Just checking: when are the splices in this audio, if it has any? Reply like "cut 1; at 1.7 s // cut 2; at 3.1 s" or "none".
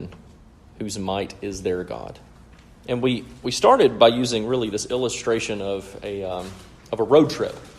cut 1; at 2.8 s